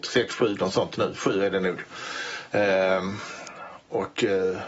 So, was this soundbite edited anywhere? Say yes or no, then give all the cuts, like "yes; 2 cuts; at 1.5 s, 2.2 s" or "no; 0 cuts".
no; 0 cuts